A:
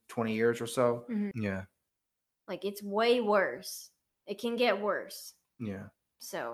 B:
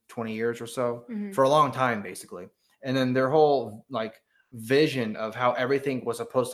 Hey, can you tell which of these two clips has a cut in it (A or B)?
A